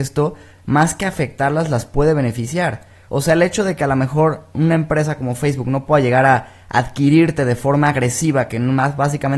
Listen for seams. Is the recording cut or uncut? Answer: uncut